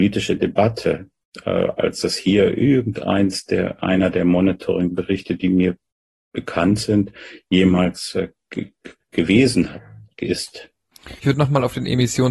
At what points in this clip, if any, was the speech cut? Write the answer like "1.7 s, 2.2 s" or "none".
11.2 s